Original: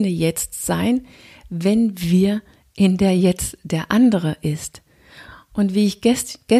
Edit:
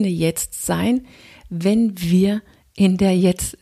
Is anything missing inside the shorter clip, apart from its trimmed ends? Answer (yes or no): no